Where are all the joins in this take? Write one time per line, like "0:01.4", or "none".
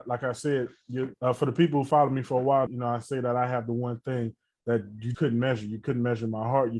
0:01.1
0:02.7
0:05.1